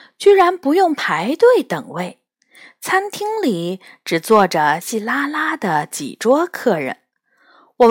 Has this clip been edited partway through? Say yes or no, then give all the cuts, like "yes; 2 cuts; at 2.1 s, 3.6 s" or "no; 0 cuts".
yes; 1 cut; at 4.8 s